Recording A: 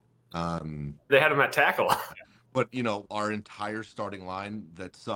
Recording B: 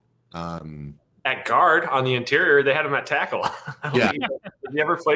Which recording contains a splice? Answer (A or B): A